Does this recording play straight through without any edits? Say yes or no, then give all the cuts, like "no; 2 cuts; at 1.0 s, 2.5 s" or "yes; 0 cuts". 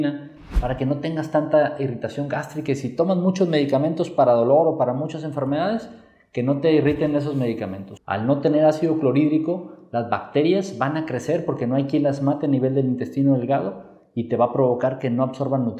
no; 1 cut; at 8.0 s